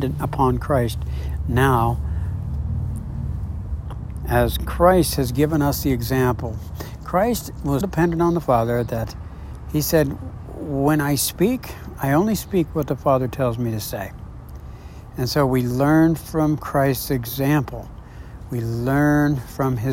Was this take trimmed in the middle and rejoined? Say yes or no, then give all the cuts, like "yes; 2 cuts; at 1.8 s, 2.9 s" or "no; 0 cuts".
yes; 1 cut; at 7.8 s